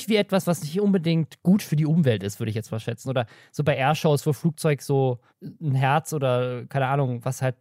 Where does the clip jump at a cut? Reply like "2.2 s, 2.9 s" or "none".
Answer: 3.0 s, 5.3 s